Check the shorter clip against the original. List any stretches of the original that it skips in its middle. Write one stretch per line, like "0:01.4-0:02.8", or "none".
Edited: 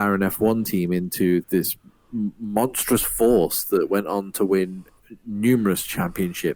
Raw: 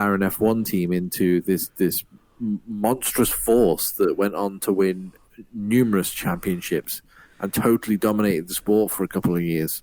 0:01.4-0:01.7